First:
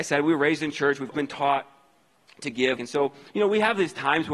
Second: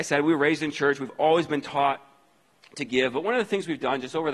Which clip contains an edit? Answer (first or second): first